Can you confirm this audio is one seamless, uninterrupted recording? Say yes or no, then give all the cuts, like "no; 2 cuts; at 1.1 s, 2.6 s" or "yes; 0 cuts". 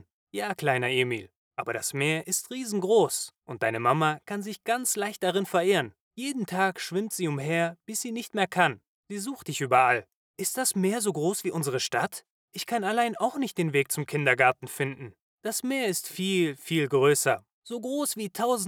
yes; 0 cuts